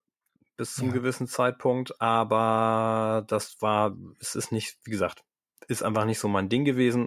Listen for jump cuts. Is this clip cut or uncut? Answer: uncut